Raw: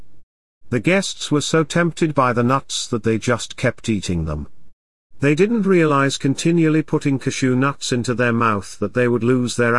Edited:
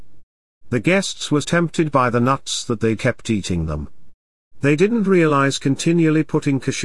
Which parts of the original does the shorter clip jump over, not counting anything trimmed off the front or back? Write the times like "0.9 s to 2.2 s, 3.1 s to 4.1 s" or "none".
1.4 s to 1.6 s, 3.2 s to 3.6 s